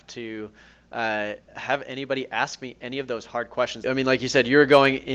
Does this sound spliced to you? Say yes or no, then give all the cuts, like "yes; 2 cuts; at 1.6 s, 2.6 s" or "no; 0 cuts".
yes; 2 cuts; at 1.5 s, 3.8 s